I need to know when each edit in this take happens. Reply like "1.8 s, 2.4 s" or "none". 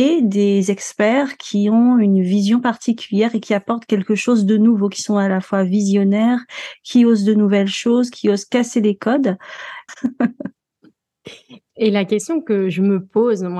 9.9 s, 11.7 s